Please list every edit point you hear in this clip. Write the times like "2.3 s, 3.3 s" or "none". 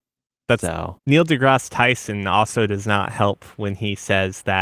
1.0 s